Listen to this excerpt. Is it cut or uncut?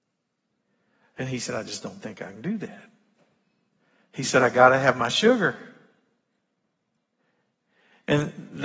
uncut